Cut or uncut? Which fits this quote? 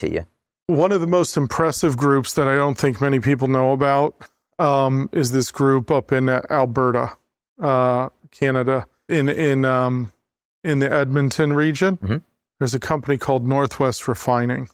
cut